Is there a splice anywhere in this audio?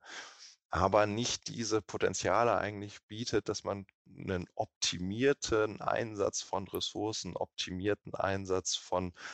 no; 0 cuts

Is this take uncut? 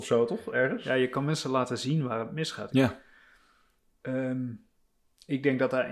no; 1 cut; at 2.7 s

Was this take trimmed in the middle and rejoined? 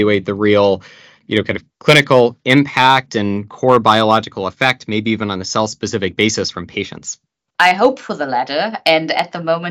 no; 0 cuts

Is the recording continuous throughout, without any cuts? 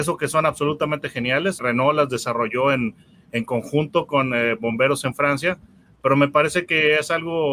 no; 1 cut; at 1.6 s

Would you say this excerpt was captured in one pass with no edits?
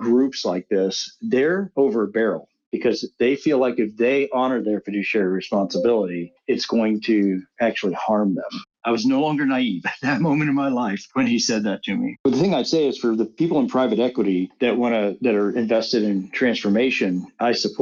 no; 2 cuts; at 8.7 s, 12.2 s

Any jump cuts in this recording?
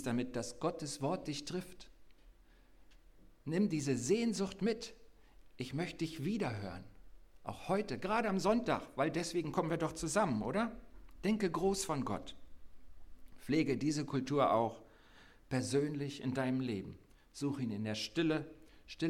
no; 0 cuts

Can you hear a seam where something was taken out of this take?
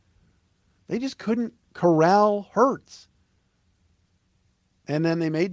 no; 0 cuts

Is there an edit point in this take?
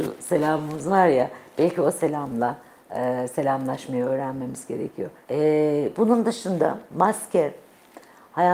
yes; 1 cut; at 5.2 s

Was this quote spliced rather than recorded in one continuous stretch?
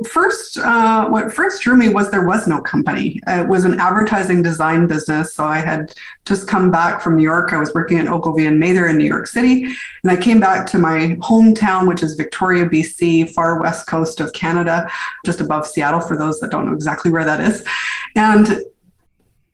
no; 0 cuts

